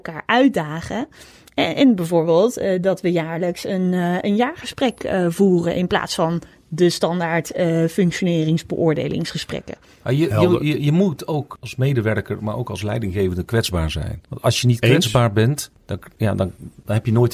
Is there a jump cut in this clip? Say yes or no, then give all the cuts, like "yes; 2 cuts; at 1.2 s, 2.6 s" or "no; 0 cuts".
no; 0 cuts